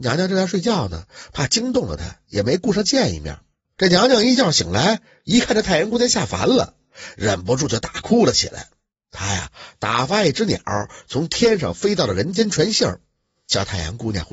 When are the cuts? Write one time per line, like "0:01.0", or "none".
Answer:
0:03.6